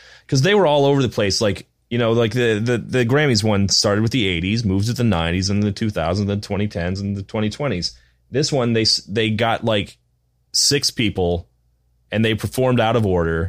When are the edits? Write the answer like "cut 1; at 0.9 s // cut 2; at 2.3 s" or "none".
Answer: none